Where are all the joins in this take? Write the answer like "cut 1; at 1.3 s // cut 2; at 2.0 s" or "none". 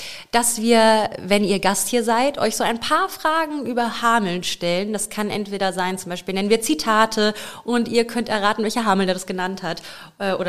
none